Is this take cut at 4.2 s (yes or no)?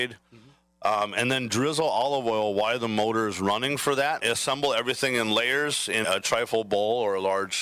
yes